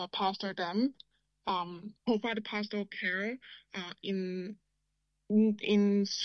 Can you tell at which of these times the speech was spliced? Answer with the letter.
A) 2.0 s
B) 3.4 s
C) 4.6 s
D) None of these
A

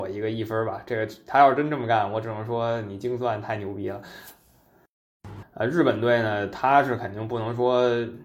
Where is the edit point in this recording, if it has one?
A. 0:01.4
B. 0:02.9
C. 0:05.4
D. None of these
C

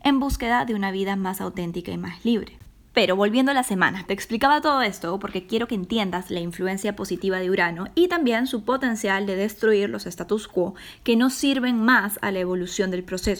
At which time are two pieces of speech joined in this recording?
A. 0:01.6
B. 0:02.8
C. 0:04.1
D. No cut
C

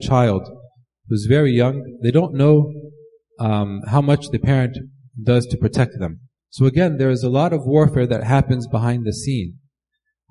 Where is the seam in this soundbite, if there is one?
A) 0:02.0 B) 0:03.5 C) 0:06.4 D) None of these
C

